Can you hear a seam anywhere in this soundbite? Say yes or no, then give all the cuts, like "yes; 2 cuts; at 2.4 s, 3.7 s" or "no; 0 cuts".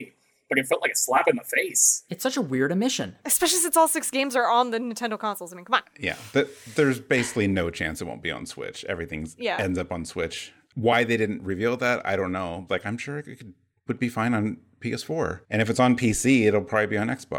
yes; 2 cuts; at 12.7 s, 15.4 s